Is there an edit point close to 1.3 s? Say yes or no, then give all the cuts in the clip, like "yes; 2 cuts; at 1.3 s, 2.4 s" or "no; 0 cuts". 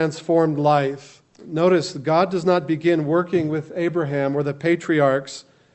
yes; 1 cut; at 1.3 s